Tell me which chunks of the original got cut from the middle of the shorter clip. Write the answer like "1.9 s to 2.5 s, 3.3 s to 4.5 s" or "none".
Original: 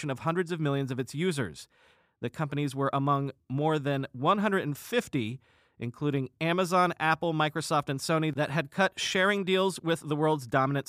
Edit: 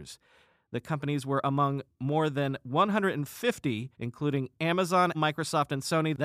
5.4 s to 5.7 s, 6.9 s to 7.3 s